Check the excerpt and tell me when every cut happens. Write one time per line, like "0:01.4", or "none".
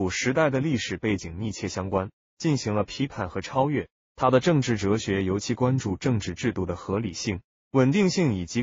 0:02.3
0:03.9